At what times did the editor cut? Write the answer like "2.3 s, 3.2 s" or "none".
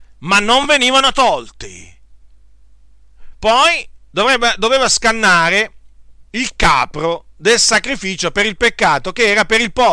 3.3 s, 4.9 s, 6.3 s